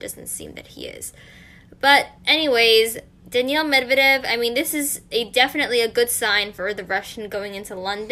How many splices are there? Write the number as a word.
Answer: zero